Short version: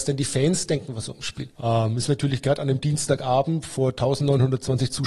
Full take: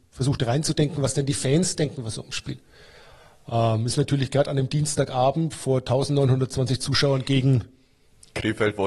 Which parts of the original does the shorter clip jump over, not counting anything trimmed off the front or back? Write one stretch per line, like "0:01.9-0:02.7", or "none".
0:02.6-0:03.4